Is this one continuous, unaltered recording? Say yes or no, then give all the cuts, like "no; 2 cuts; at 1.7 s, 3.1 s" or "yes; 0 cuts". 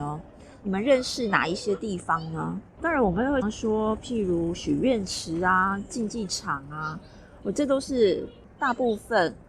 no; 1 cut; at 3.4 s